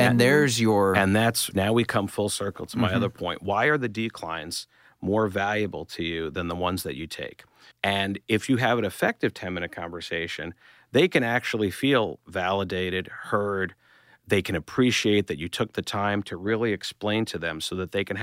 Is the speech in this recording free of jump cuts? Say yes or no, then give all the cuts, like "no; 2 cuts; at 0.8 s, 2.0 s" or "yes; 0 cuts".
no; 2 cuts; at 1.5 s, 7.7 s